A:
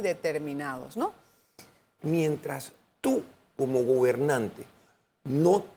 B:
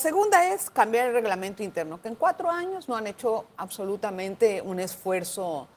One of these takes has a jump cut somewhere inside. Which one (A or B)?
A